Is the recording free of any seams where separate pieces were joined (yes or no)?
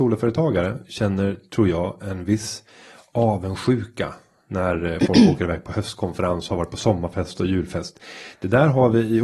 yes